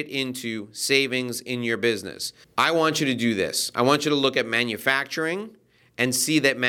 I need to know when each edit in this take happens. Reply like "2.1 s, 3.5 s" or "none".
2.4 s